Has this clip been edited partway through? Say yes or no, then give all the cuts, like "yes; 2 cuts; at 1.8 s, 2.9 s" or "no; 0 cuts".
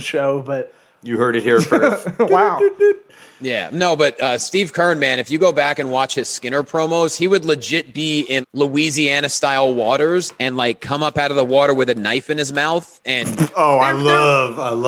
yes; 1 cut; at 8.4 s